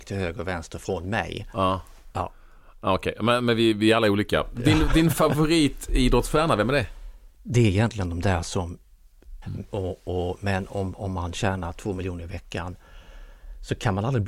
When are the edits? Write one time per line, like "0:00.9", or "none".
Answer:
0:09.4